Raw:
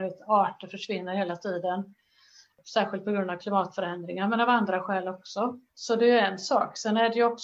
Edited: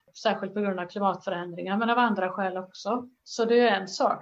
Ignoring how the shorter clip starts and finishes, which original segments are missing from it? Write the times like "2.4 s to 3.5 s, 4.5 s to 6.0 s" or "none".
none